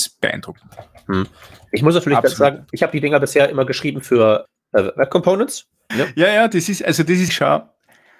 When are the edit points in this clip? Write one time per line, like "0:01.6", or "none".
0:05.9
0:07.3